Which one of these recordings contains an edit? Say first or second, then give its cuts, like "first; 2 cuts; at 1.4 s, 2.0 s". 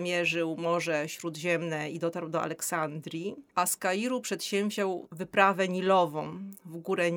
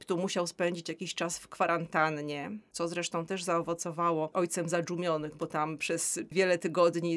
first; 1 cut; at 3.5 s